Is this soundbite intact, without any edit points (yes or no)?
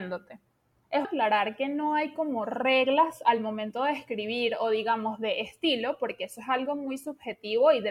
no